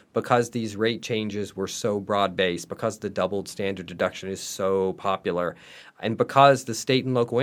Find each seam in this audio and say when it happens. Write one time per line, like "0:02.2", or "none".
none

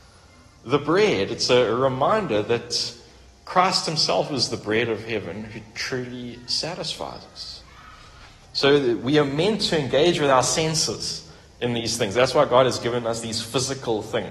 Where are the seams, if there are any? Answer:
none

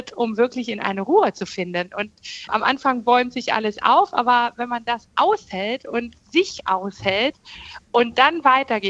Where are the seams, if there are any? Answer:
0:02.5

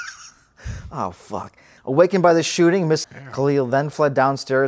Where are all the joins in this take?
0:01.8
0:03.0

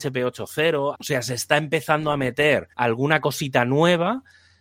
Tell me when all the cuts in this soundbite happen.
0:00.9
0:02.7

